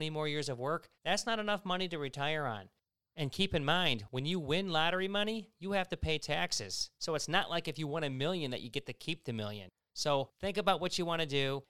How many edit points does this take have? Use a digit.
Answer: 1